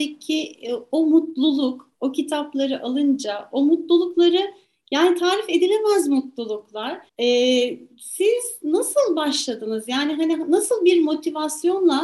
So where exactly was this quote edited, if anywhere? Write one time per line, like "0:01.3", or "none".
0:07.1